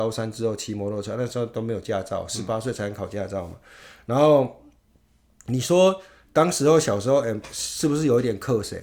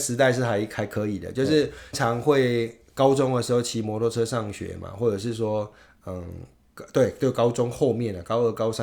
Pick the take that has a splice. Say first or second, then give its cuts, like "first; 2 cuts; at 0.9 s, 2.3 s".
second; 1 cut; at 1.9 s